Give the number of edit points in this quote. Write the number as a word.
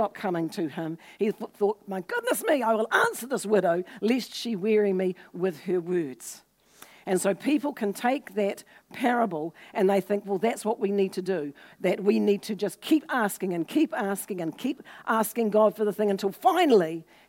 one